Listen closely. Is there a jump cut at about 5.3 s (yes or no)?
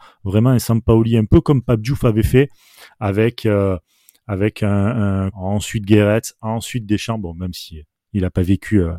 yes